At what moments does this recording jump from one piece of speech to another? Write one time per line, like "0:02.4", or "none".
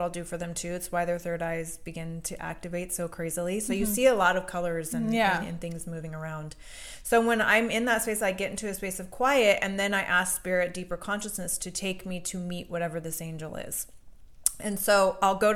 none